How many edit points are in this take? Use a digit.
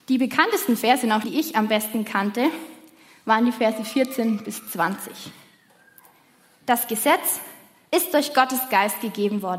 1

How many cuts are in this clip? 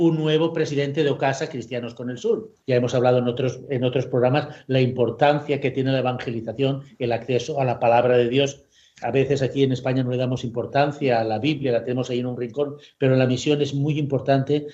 1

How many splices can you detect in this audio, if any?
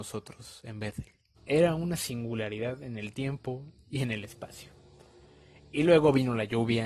1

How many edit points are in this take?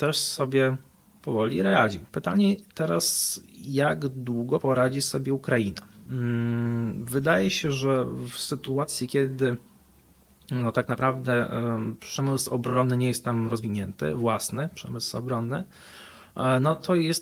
1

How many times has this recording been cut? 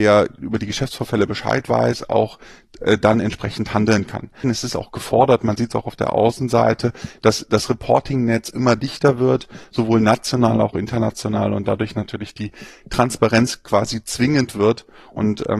1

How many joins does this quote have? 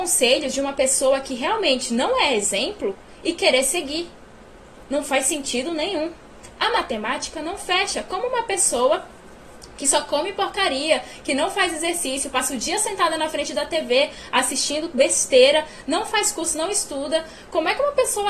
0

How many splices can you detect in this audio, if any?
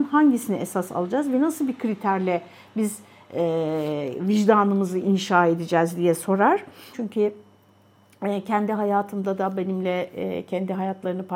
1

